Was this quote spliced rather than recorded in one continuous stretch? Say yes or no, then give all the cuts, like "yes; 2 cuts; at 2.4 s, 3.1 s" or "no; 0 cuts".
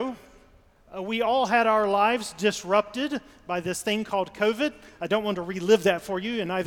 no; 0 cuts